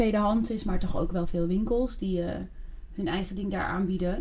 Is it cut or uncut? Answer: uncut